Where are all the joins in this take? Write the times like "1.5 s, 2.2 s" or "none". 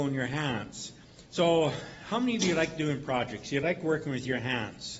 1.3 s